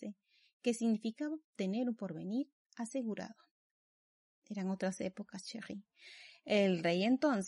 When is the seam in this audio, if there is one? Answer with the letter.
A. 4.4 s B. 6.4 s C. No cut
C